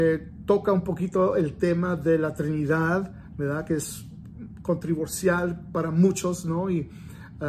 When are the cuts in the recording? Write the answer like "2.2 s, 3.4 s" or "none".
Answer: none